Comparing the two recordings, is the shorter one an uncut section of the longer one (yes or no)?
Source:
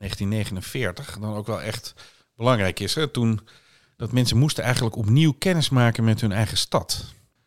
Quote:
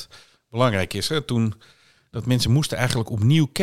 yes